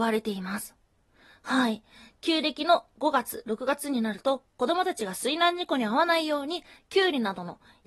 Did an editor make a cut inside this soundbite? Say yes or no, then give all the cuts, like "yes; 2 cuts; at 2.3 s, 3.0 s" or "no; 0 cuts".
no; 0 cuts